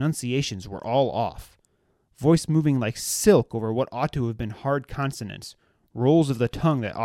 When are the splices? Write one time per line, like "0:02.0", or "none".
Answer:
none